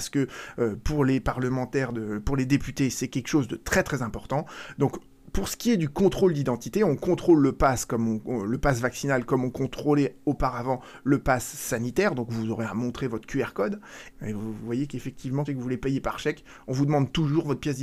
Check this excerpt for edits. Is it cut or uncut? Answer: cut